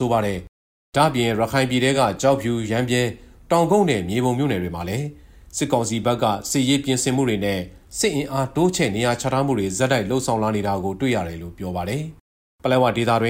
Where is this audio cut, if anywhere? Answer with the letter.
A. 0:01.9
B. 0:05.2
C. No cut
C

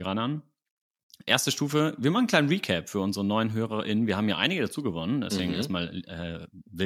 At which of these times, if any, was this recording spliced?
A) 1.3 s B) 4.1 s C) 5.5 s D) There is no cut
A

